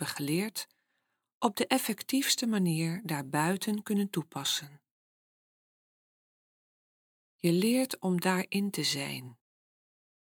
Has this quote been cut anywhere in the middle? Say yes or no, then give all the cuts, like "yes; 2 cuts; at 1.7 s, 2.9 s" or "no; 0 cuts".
yes; 1 cut; at 7.2 s